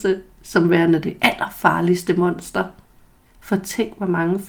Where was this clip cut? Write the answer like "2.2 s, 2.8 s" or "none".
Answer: 3.3 s